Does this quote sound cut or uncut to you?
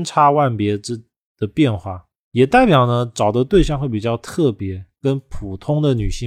uncut